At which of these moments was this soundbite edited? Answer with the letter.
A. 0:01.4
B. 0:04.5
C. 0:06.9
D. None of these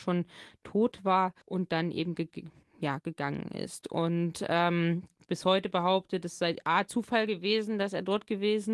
A